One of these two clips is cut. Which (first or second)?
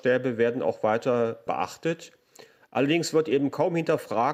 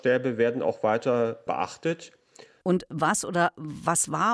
second